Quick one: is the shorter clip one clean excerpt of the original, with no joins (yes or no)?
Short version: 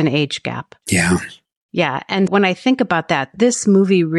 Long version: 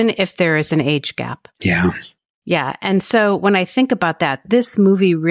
no